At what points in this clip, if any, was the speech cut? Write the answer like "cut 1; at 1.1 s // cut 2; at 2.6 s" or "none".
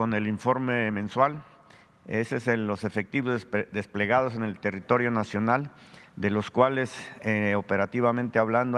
none